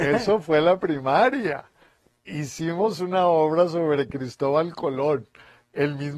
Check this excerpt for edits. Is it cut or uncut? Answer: uncut